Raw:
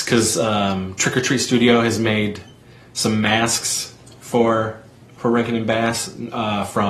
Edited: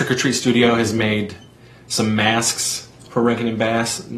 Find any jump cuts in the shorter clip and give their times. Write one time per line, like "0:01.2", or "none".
0:03.1